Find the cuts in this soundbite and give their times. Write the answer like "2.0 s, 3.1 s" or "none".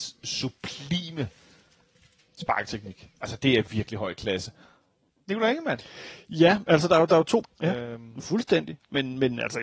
3.7 s, 7.4 s

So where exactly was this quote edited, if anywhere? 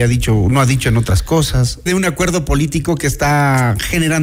1.9 s

